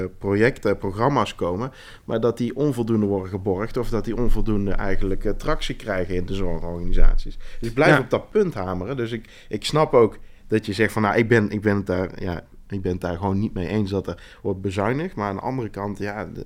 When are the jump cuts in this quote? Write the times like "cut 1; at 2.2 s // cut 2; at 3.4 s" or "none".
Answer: none